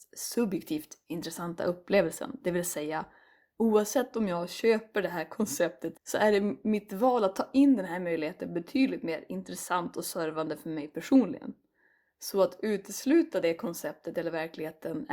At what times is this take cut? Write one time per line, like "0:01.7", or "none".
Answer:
0:05.9